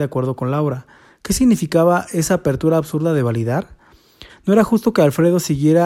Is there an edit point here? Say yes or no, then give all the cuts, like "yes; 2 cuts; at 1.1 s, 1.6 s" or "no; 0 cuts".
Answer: yes; 1 cut; at 4.3 s